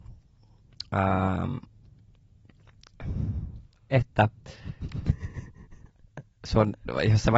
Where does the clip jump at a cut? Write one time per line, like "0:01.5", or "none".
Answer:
0:03.9